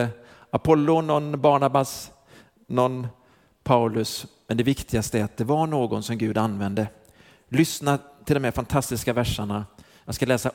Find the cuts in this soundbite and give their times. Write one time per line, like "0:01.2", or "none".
none